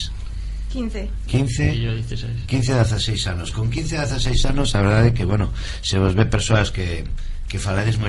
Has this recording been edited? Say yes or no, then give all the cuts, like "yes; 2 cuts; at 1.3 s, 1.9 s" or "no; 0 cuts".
no; 0 cuts